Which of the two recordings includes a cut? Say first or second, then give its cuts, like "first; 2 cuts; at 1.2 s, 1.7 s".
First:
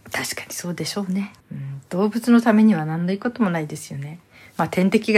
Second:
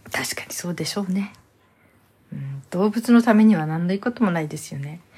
first; 1 cut; at 1.4 s